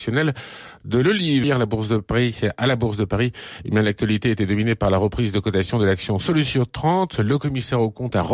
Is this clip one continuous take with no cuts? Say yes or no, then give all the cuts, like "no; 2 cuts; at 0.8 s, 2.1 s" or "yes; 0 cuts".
no; 1 cut; at 1.4 s